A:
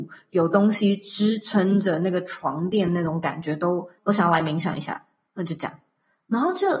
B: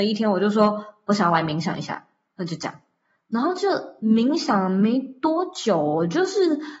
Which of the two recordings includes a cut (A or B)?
A